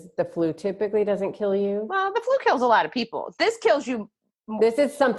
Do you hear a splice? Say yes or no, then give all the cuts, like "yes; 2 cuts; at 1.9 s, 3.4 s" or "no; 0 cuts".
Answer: no; 0 cuts